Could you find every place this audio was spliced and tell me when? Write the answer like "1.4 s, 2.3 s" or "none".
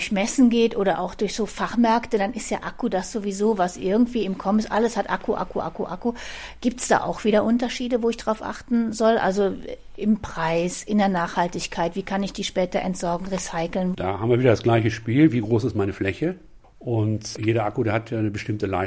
13.9 s